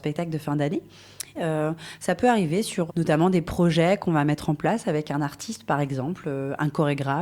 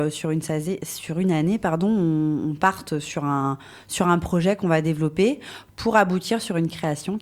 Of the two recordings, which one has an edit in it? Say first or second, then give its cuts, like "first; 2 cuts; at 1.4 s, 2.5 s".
first; 2 cuts; at 1.4 s, 2.9 s